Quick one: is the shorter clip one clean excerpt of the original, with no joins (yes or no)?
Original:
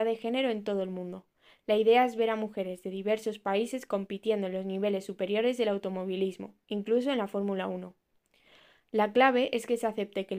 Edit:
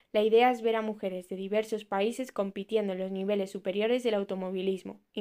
yes